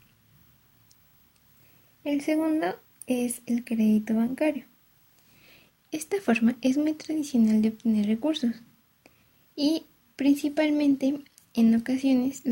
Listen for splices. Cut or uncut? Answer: uncut